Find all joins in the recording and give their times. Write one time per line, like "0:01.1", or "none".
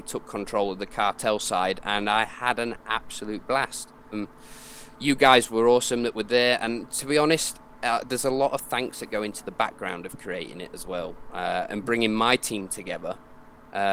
0:04.1
0:11.7